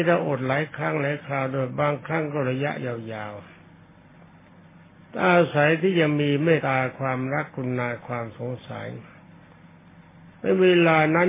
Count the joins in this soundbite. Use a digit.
1